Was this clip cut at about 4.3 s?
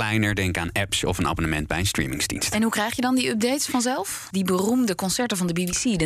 yes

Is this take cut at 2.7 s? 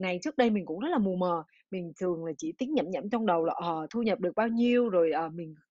no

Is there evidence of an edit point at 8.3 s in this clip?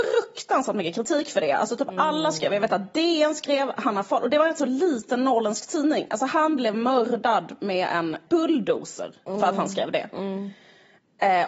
yes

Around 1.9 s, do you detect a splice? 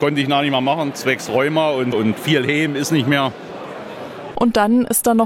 yes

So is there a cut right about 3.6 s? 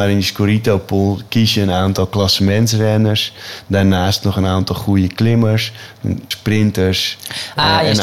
no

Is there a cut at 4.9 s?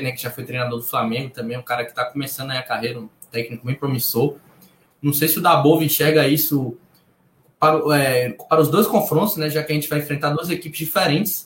yes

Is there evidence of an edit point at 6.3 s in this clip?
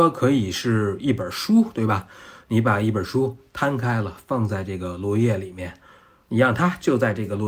yes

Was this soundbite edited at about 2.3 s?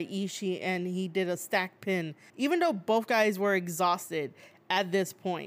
yes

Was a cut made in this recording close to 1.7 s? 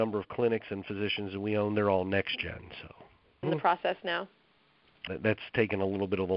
no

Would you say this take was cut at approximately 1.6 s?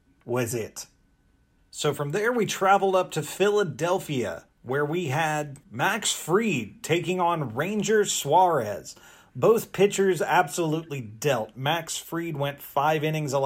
yes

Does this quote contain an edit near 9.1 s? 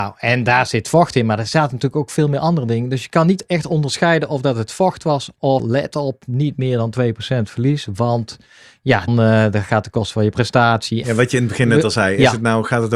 yes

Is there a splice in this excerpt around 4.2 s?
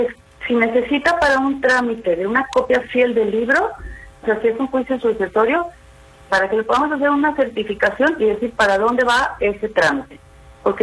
yes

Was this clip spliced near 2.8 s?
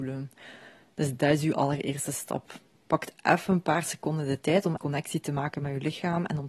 yes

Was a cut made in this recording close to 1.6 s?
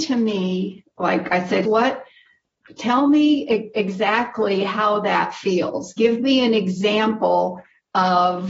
yes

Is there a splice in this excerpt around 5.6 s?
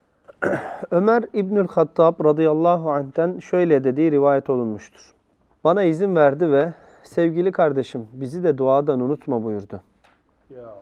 yes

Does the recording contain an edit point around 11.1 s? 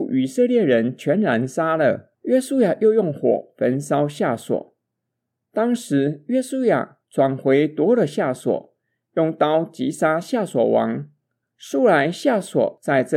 no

